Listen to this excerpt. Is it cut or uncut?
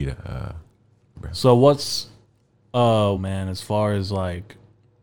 cut